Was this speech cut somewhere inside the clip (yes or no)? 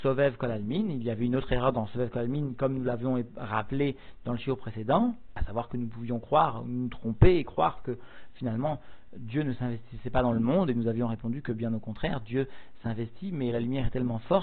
no